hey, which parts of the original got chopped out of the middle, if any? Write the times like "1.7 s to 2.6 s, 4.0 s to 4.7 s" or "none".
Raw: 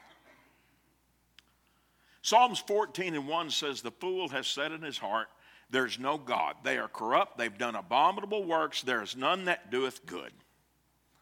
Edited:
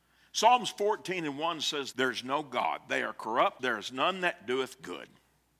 3.8 s to 5.7 s, 7.3 s to 8.8 s